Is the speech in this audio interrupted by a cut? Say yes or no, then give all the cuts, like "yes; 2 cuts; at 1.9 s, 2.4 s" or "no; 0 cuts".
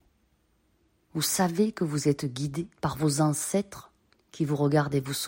yes; 2 cuts; at 1.0 s, 2.8 s